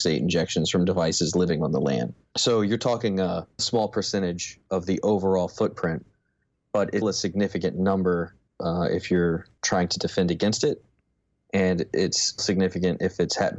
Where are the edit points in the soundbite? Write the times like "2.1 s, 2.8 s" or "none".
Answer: 7.0 s, 12.4 s